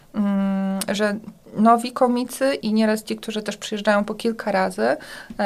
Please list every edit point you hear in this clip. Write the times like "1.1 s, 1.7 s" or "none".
2.6 s